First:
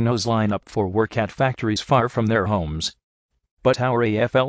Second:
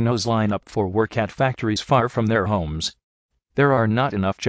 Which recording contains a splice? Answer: first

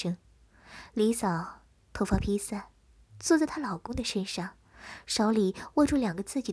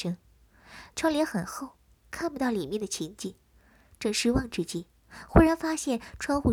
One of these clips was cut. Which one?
second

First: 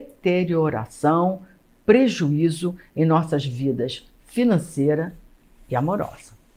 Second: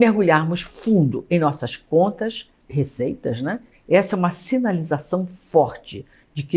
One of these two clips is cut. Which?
second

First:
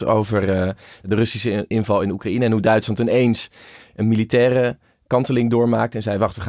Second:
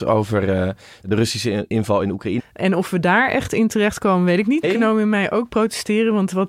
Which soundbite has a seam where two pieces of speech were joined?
second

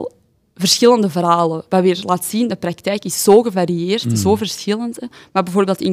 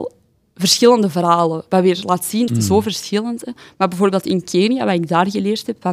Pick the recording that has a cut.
second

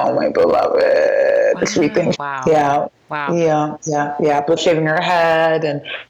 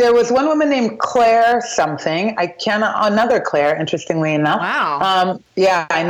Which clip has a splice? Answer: first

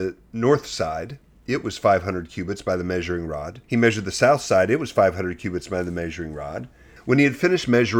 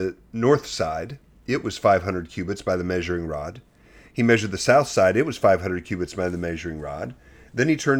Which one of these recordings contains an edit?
first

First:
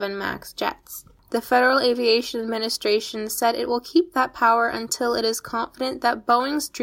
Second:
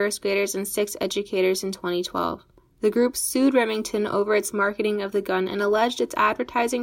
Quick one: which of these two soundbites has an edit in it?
first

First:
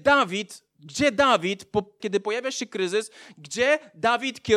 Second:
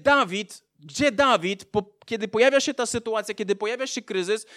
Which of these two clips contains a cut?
first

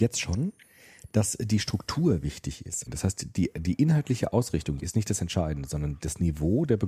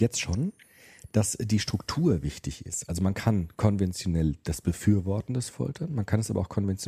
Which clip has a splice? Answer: first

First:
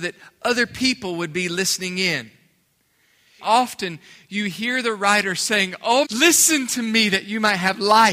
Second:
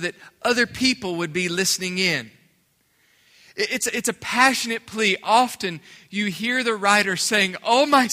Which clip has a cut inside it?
first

